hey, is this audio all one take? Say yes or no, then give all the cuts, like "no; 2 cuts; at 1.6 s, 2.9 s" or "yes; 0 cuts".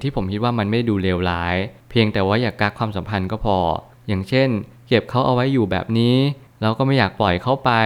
yes; 0 cuts